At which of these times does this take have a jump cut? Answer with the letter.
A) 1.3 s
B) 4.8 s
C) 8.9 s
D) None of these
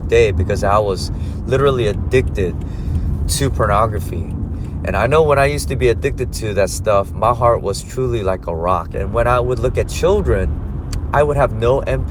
C